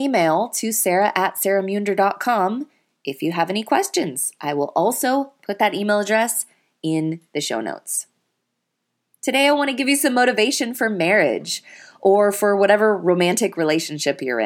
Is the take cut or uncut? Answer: uncut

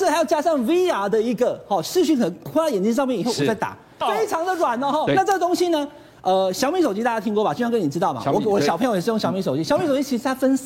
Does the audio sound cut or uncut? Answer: cut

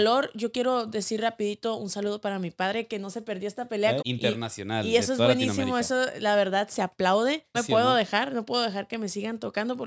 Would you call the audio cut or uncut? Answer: cut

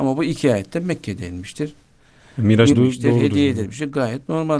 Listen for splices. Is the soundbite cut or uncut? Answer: cut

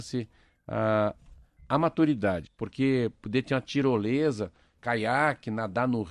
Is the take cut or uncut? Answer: cut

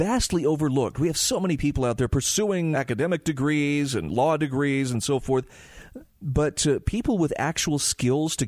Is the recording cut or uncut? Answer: cut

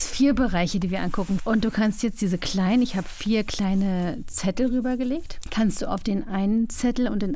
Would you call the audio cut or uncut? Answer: cut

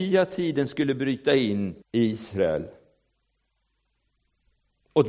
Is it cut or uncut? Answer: cut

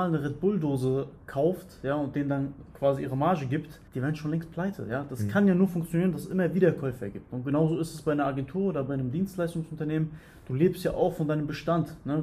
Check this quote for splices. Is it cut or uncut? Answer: cut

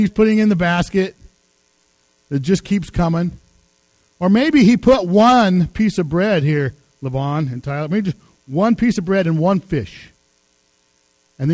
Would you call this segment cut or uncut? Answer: uncut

